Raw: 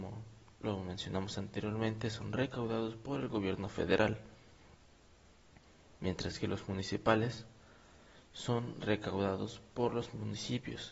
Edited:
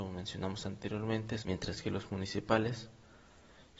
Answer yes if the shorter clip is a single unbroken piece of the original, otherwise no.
no